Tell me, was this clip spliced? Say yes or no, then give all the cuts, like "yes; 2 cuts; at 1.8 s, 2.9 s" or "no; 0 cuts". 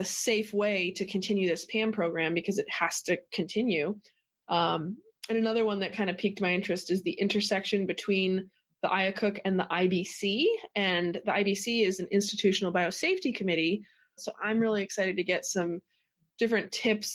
yes; 1 cut; at 14.2 s